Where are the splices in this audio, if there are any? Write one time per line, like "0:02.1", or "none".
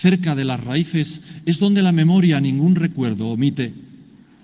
none